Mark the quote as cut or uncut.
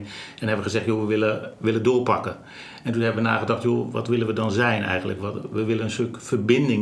uncut